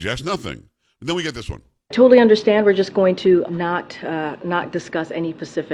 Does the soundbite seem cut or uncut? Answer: cut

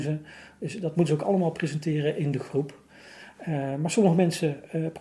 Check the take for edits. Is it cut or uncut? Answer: uncut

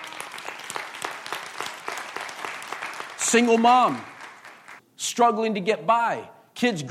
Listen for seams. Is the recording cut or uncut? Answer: cut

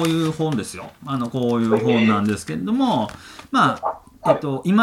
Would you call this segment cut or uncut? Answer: uncut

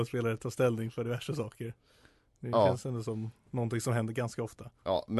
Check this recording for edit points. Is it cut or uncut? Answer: uncut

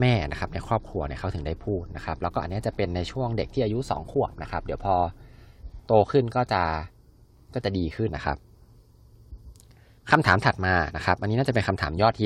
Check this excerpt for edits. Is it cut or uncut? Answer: cut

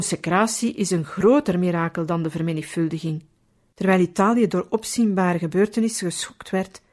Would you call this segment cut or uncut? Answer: cut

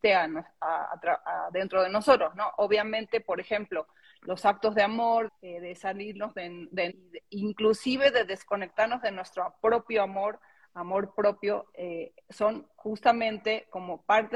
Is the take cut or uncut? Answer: cut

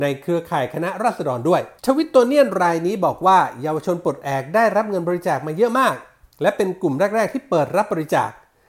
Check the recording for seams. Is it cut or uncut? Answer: cut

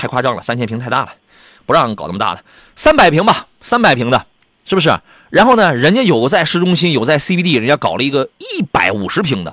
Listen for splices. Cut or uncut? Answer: uncut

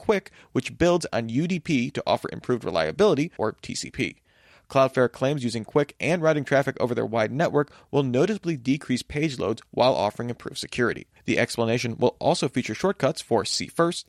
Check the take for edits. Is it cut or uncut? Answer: cut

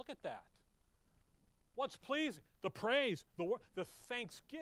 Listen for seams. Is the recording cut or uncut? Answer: uncut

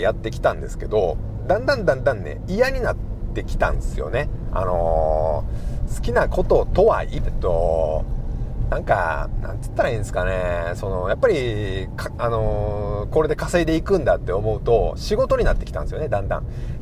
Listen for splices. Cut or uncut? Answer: cut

